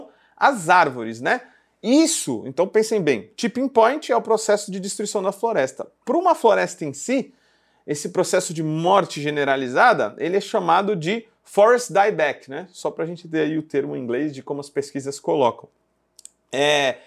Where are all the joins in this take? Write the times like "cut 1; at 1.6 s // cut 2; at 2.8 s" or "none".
none